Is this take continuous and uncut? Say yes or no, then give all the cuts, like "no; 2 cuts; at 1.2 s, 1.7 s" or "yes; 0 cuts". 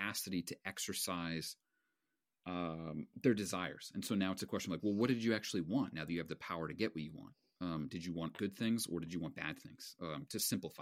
yes; 0 cuts